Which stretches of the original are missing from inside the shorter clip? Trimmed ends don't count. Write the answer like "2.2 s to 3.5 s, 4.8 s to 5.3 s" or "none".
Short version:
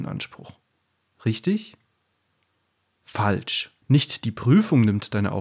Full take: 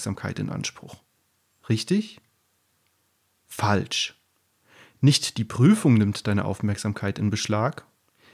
4.3 s to 4.9 s